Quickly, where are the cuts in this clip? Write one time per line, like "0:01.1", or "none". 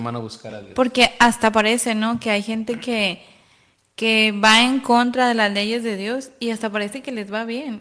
none

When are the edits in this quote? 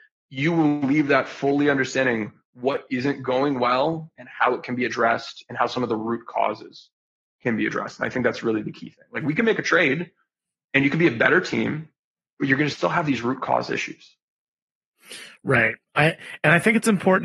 none

